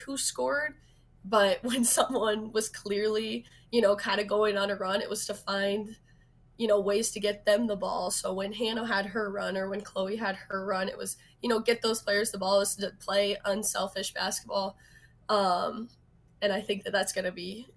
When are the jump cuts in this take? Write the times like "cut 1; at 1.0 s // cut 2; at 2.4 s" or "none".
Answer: none